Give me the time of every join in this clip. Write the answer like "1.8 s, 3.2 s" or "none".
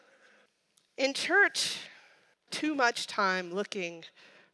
2.5 s